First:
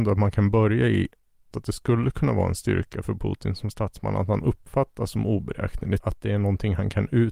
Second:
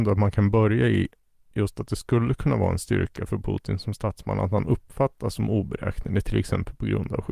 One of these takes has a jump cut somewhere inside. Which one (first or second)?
first